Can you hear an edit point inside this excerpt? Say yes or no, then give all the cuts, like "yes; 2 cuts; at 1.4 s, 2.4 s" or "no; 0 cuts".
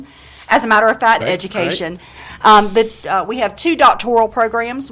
yes; 1 cut; at 1.2 s